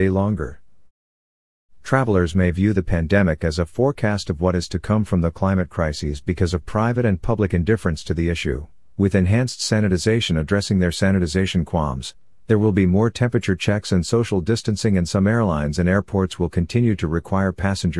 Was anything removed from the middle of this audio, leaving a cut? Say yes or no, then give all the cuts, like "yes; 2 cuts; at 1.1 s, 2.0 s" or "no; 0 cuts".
yes; 1 cut; at 8.9 s